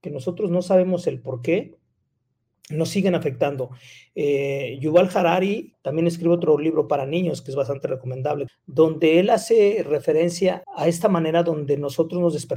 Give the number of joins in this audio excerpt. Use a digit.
3